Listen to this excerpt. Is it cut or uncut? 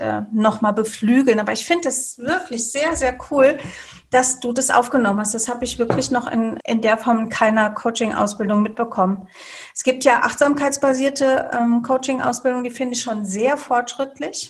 cut